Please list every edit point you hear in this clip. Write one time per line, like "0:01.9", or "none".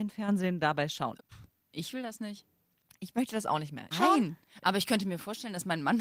0:01.2
0:03.9